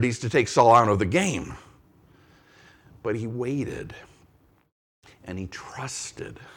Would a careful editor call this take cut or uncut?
uncut